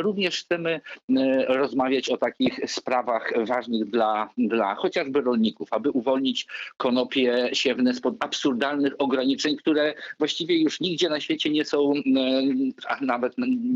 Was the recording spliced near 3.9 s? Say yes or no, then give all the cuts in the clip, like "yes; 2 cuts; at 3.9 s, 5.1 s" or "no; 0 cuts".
no; 0 cuts